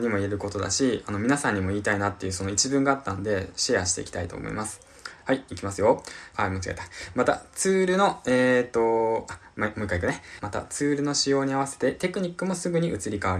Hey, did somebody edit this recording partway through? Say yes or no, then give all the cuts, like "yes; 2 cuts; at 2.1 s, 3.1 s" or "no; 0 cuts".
yes; 2 cuts; at 6.3 s, 10.4 s